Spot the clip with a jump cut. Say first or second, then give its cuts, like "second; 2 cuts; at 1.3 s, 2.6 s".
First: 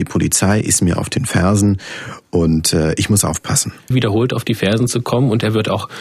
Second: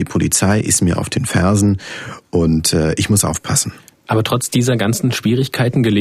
first; 1 cut; at 3.9 s